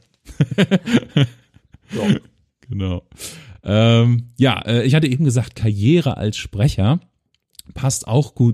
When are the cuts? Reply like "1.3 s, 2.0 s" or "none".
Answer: none